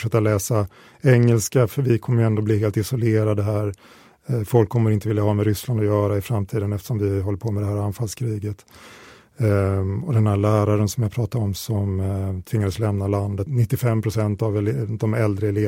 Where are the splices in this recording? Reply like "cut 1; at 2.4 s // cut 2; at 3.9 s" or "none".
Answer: cut 1; at 13.5 s